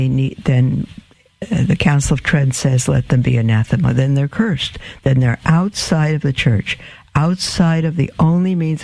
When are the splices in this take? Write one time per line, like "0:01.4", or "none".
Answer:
none